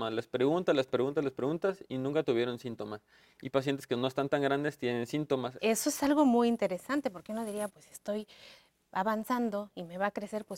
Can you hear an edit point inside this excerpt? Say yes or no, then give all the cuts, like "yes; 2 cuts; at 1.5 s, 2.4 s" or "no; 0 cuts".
yes; 2 cuts; at 5.6 s, 7.7 s